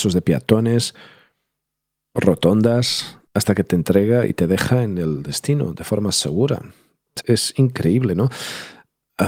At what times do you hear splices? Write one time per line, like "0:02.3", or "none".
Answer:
0:03.3
0:07.2